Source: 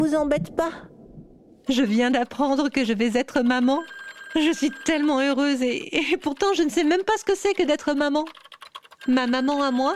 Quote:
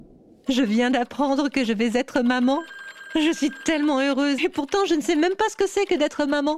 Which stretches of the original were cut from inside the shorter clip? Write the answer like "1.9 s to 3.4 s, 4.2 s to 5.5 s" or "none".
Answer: 5.6 s to 6.1 s